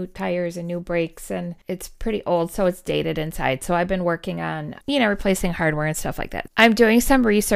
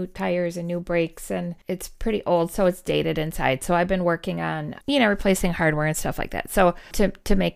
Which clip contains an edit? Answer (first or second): first